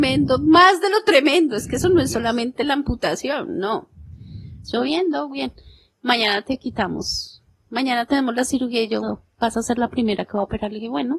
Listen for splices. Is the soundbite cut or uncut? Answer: cut